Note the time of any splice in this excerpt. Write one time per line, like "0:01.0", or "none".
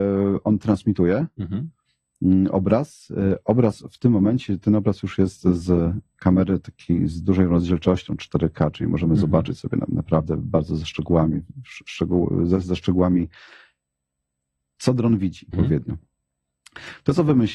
0:15.5

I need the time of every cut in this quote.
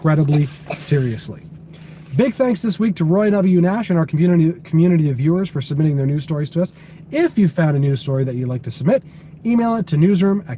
none

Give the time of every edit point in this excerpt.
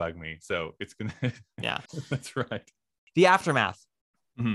0:01.8

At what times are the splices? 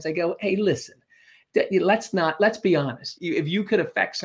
0:03.2

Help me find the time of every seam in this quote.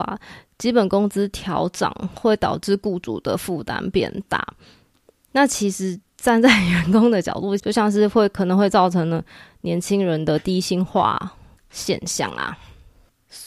0:07.6
0:11.6

